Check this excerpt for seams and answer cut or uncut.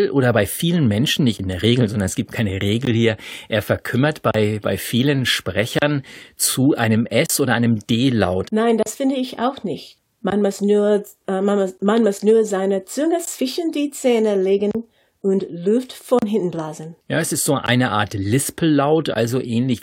cut